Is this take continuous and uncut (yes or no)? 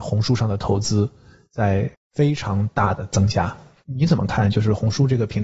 yes